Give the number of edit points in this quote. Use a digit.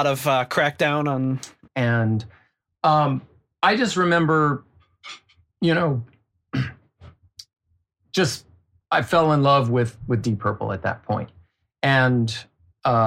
1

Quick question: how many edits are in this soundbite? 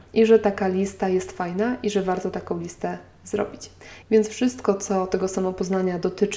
1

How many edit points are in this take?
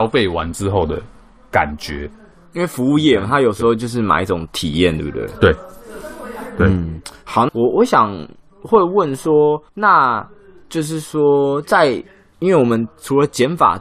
2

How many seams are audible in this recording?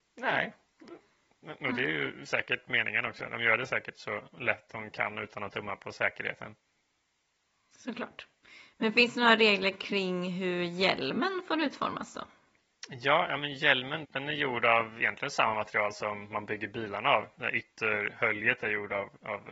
1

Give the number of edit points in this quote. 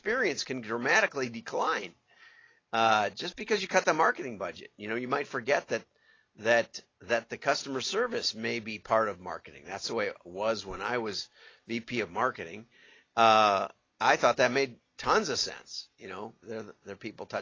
2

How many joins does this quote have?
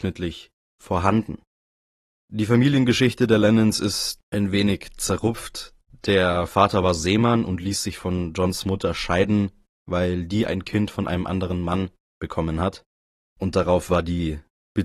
0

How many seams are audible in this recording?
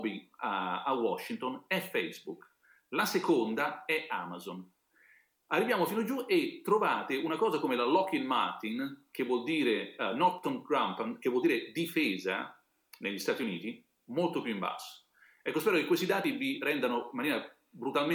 0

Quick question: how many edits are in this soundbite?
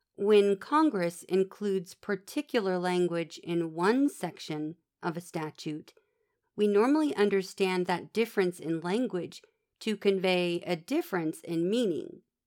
1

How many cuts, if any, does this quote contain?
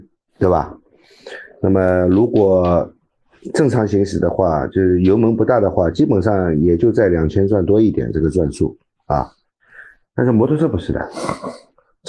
0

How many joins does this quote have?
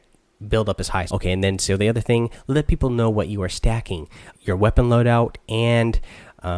2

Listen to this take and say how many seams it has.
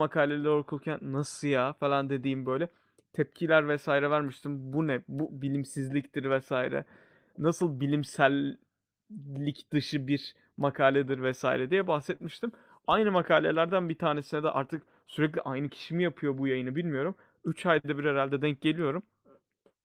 1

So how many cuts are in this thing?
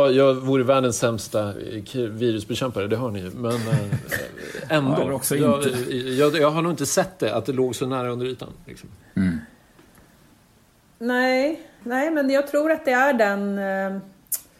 1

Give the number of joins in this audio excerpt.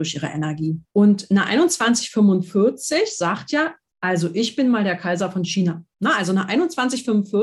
1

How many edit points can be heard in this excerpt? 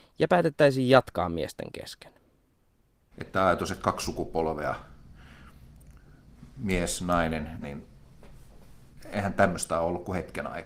2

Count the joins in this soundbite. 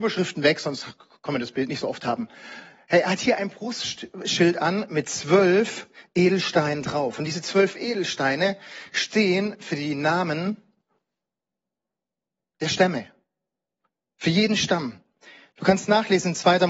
0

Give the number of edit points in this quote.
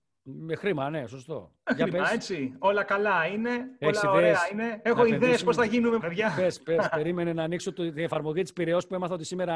1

